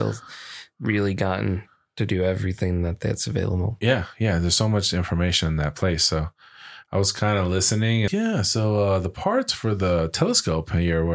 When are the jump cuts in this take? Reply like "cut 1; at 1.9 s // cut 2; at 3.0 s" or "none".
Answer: cut 1; at 8.1 s